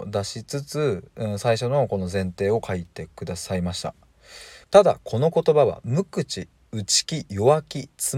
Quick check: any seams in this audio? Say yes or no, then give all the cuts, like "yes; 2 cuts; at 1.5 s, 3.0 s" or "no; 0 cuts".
yes; 1 cut; at 4.6 s